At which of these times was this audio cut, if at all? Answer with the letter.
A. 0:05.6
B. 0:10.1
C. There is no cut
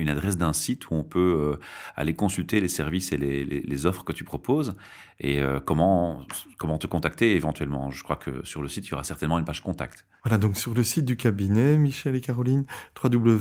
C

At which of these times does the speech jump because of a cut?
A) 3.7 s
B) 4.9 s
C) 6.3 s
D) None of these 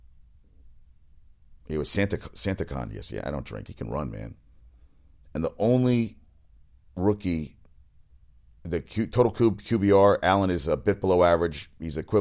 A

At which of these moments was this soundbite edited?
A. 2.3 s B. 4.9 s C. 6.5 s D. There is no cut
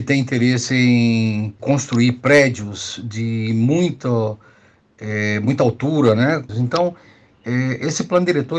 C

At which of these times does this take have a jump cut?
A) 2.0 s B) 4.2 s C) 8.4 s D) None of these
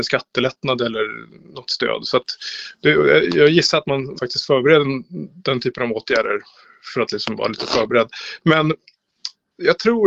B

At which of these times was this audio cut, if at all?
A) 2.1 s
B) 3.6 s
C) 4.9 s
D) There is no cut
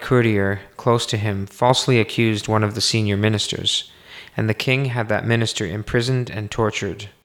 D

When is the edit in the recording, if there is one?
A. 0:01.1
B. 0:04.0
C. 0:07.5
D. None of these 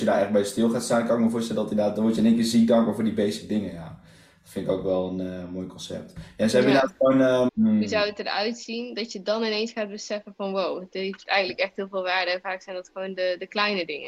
C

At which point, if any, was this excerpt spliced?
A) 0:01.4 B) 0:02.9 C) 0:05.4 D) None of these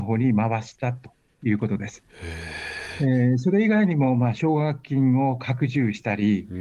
D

